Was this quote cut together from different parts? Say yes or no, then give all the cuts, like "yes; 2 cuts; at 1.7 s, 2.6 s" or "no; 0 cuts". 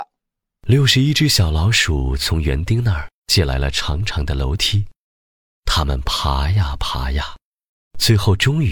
no; 0 cuts